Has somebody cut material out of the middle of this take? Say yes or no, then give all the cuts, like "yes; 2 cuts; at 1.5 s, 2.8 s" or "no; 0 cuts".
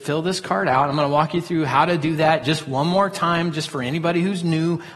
no; 0 cuts